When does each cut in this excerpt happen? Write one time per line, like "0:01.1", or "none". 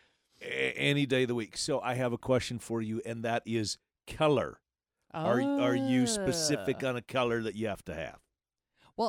none